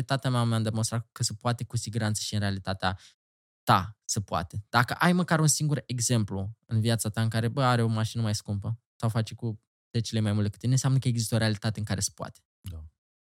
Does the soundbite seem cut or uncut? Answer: uncut